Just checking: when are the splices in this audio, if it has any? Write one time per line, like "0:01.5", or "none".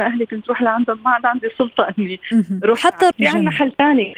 0:03.1